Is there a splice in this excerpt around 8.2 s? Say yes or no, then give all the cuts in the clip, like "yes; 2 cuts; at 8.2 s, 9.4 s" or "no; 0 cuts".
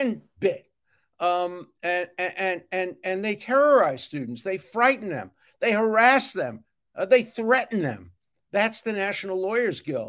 no; 0 cuts